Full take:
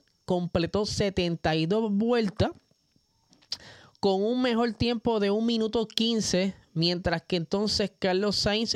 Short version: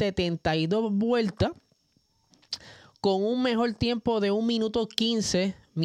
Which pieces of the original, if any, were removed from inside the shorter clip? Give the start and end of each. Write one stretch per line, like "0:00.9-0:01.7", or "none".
none